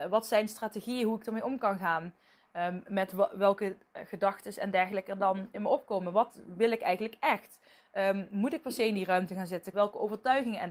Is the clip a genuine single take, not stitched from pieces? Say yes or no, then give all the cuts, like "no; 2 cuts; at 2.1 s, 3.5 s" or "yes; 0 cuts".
no; 1 cut; at 9.7 s